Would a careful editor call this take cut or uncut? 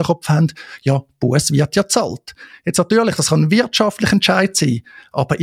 uncut